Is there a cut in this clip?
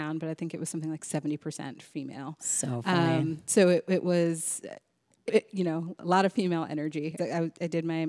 yes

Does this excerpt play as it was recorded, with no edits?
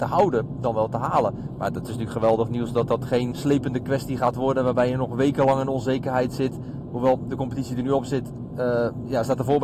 no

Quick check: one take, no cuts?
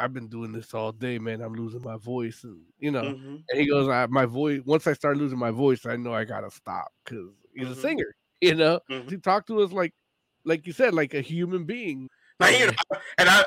no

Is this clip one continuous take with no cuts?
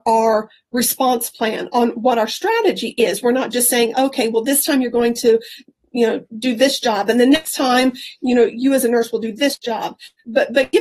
yes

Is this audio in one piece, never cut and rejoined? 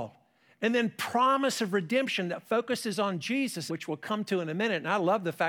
no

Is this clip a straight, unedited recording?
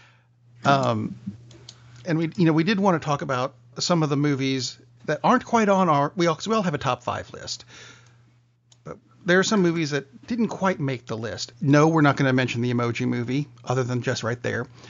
no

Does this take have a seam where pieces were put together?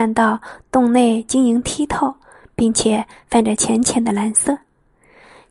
no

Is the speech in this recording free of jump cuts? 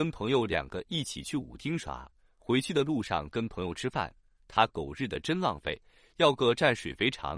yes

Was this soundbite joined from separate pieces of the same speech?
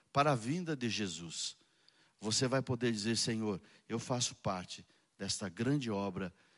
no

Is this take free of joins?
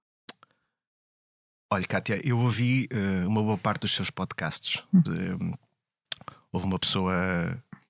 no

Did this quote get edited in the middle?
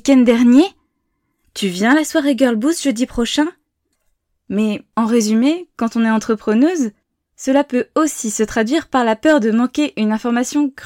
no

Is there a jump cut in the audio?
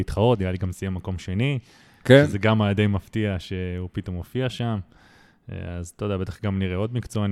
no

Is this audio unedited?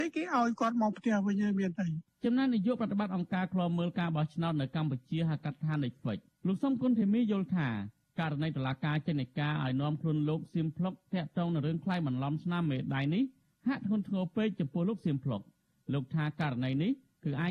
yes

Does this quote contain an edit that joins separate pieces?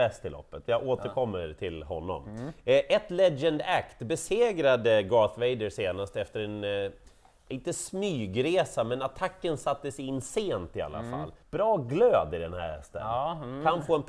yes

